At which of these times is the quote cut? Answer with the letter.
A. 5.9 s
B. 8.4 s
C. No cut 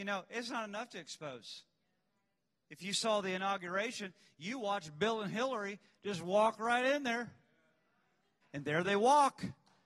B